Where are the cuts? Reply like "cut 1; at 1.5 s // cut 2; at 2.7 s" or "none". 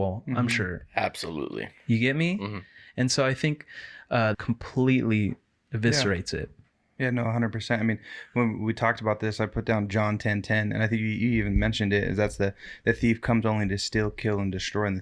cut 1; at 4.3 s